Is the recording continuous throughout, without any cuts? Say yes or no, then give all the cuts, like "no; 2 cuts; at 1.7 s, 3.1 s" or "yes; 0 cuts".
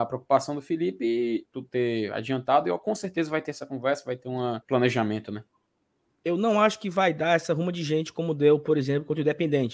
no; 2 cuts; at 1.5 s, 4.6 s